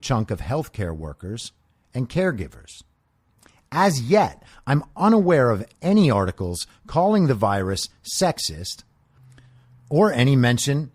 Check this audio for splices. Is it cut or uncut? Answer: uncut